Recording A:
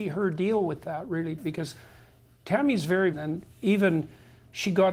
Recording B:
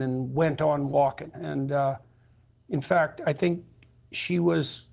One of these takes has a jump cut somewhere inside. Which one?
A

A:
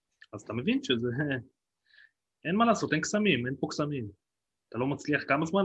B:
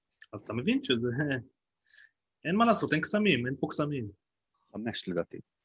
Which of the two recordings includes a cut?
B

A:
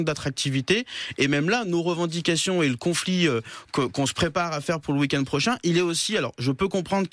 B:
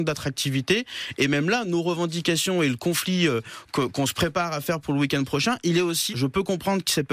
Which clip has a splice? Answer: B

